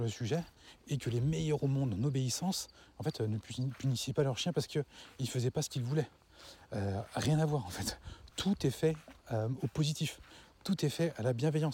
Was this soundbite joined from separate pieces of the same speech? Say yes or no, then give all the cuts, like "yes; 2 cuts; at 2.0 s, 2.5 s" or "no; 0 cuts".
no; 0 cuts